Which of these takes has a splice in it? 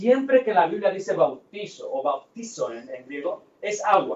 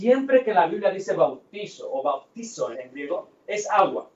second; 1 cut; at 2.7 s

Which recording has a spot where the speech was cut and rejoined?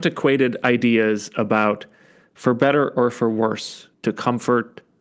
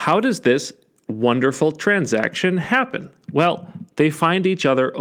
first; 1 cut; at 3.9 s

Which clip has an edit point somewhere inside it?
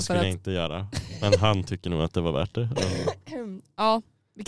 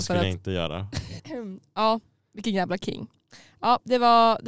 second; 1 cut; at 1.2 s

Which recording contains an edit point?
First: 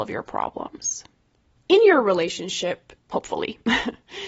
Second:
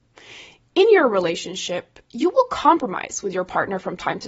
first; 2 cuts; at 1.6 s, 3.0 s

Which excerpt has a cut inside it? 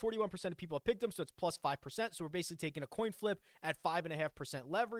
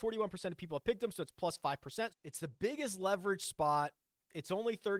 second; 1 cut; at 2.1 s

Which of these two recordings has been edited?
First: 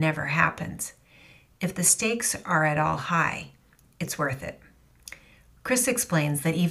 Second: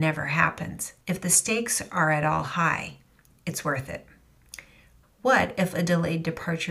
second; 2 cuts; at 1.0 s, 5.0 s

